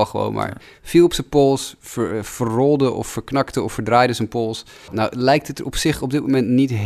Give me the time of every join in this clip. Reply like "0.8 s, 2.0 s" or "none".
4.9 s